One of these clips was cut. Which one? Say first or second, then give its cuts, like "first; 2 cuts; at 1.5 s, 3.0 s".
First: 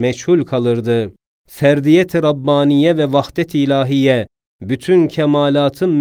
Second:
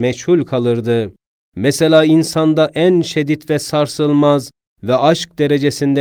second; 1 cut; at 1.4 s